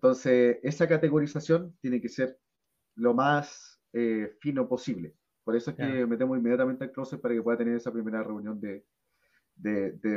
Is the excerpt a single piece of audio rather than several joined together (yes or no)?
yes